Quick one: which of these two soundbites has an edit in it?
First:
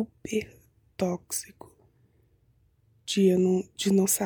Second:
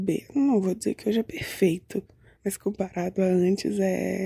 second; 1 cut; at 2.4 s

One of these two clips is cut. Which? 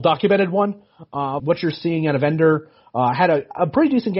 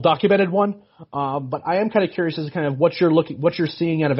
first; 1 cut; at 1.4 s

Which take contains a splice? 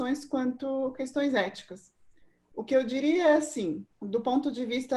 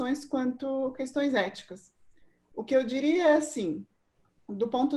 first; 1 cut; at 3.9 s

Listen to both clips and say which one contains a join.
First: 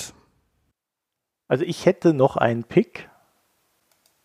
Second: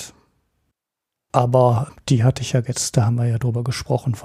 second; 1 cut; at 1.3 s

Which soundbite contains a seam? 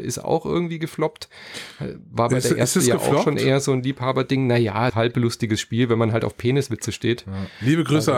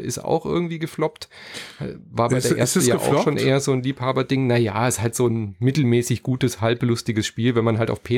first; 1 cut; at 4.9 s

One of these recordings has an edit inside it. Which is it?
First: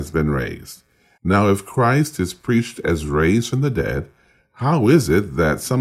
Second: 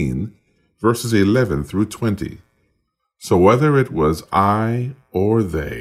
first; 1 cut; at 1.2 s

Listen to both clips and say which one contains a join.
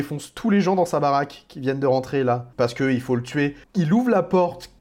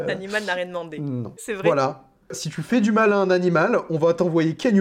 second; 1 cut; at 1.4 s

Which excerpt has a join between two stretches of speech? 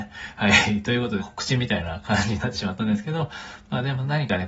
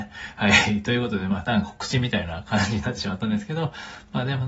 first; 1 cut; at 1.2 s

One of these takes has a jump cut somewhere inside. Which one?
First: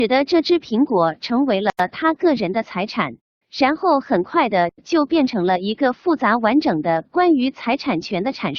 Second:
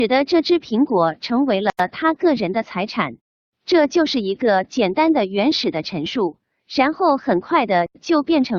first; 1 cut; at 3.4 s

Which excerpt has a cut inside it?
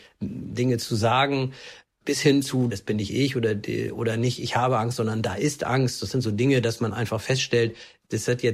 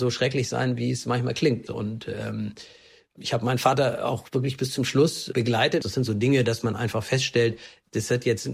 second; 2 cuts; at 1.7 s, 5.8 s

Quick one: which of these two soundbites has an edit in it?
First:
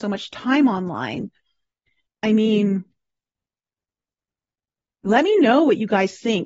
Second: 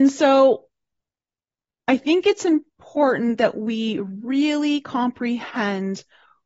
first; 1 cut; at 2.1 s

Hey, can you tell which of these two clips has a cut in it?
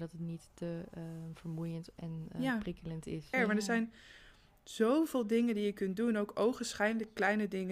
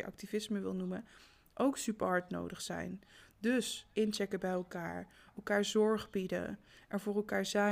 first; 1 cut; at 3.3 s

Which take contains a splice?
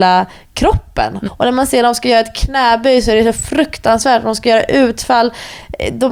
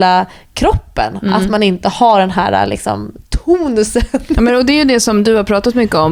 first; 1 cut; at 1.2 s

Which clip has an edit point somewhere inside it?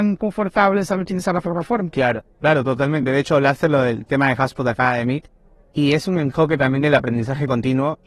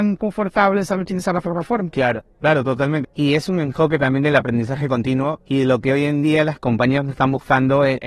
second; 1 cut; at 3.0 s

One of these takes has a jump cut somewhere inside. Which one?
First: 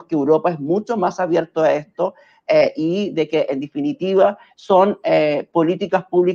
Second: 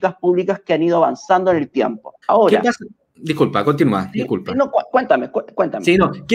second; 1 cut; at 2.2 s

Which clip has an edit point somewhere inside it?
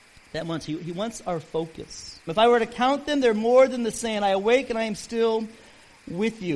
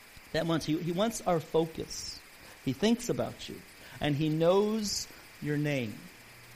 first; 1 cut; at 2.3 s

